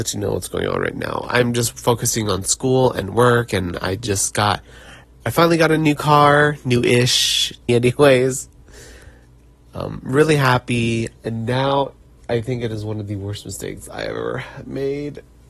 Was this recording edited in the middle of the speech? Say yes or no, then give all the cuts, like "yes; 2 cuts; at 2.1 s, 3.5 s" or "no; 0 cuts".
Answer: yes; 2 cuts; at 7.7 s, 11.2 s